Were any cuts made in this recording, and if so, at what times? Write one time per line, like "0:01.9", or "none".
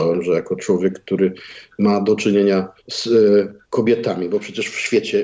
0:02.8